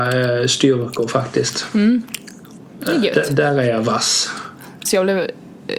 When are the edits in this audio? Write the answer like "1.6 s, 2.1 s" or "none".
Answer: 4.9 s

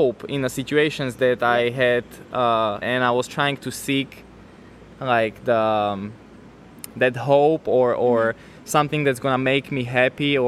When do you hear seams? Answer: 2.8 s

